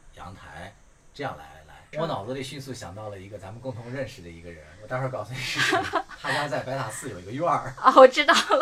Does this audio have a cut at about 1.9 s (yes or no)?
yes